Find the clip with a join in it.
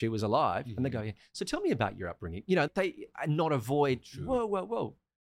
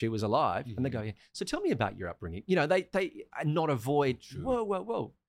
first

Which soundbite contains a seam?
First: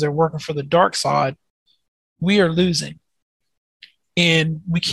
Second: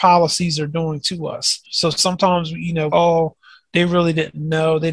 second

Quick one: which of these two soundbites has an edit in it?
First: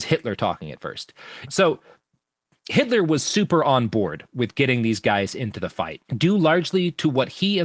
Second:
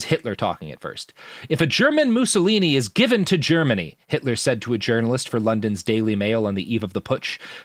first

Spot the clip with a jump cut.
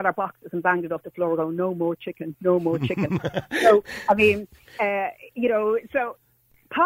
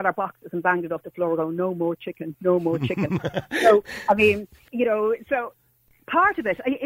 second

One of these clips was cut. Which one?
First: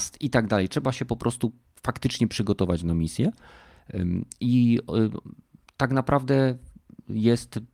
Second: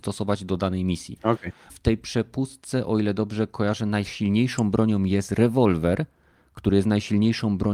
second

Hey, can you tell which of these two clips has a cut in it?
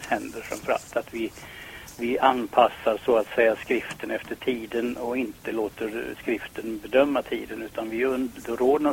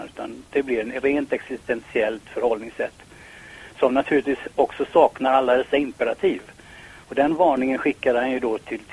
second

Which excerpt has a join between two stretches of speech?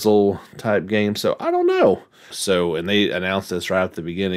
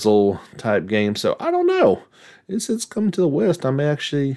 first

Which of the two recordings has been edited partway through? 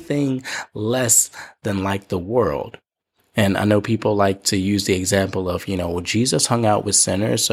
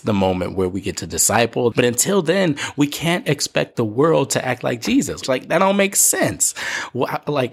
second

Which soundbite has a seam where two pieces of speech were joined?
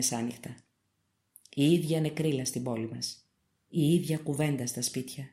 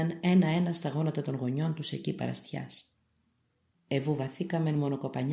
second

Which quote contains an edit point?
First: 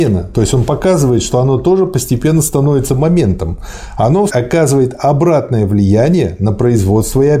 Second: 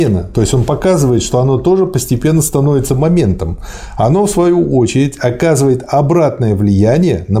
first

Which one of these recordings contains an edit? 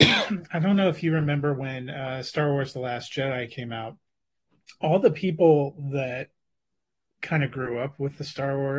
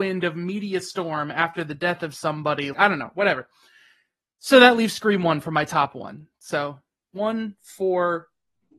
second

